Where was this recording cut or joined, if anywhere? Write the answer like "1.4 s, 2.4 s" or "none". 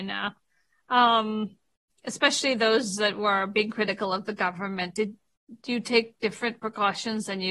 none